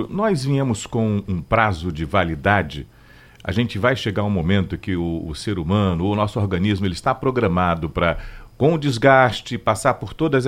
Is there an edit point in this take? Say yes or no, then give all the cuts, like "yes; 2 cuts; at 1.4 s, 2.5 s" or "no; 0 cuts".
no; 0 cuts